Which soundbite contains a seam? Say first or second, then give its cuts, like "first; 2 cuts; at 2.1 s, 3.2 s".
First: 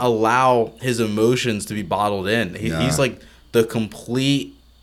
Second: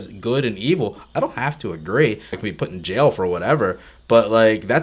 second; 1 cut; at 2.3 s